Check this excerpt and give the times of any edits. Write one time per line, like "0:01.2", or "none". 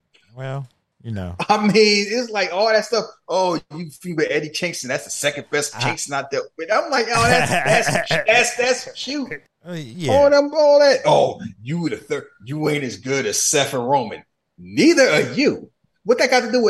0:09.5